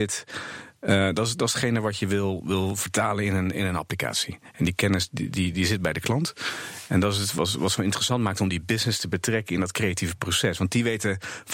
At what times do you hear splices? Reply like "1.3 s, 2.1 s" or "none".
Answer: none

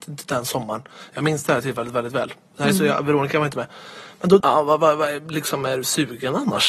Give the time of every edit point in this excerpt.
4.4 s

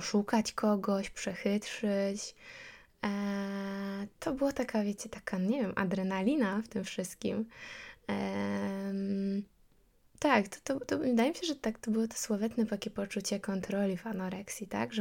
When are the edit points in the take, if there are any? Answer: none

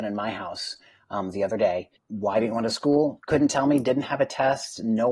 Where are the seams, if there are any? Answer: 2.0 s

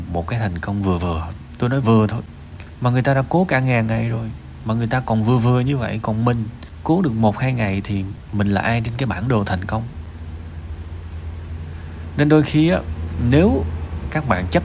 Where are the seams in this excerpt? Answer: 1.8 s

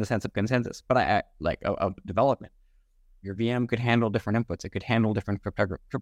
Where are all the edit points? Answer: 3.2 s

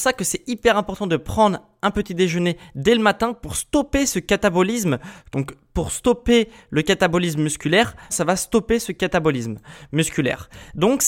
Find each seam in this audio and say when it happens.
5.3 s, 8.1 s

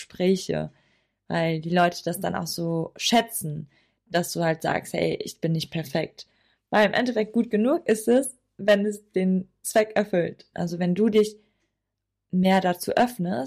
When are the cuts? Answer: 6.5 s, 10.5 s

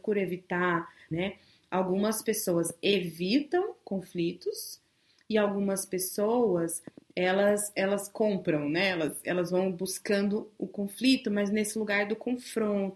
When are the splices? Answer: 1.1 s

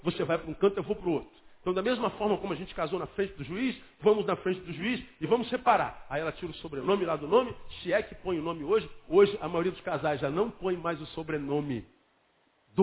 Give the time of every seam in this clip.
none

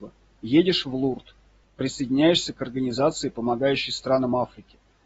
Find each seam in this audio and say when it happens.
1.6 s

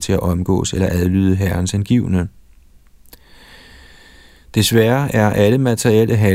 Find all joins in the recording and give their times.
none

